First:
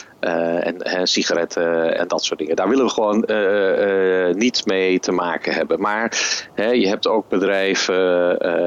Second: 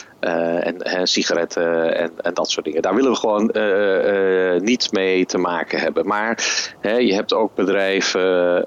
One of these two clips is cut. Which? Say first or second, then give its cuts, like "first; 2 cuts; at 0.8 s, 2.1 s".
first; 1 cut; at 2.0 s